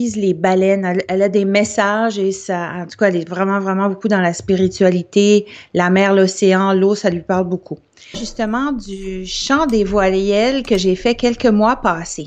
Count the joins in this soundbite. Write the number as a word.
one